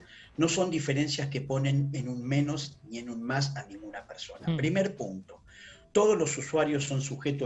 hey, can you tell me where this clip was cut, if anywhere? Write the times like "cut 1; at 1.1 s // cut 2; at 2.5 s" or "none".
none